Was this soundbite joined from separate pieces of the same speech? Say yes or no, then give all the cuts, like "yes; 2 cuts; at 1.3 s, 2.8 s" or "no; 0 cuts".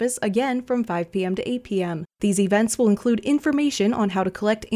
no; 0 cuts